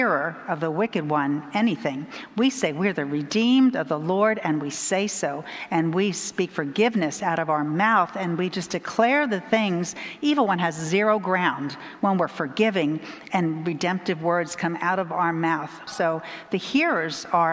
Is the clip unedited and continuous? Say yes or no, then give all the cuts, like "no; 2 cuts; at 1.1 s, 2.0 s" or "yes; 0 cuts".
no; 1 cut; at 15.9 s